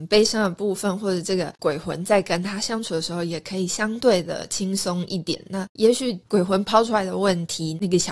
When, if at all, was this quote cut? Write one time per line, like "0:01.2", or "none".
none